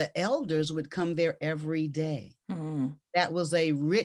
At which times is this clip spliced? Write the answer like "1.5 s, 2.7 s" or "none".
none